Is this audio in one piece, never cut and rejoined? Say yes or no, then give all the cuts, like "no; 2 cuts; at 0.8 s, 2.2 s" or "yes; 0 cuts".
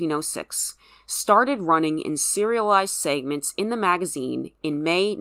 yes; 0 cuts